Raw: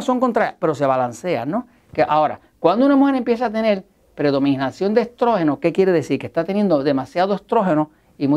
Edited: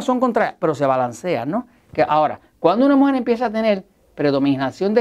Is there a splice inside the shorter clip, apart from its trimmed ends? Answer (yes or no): no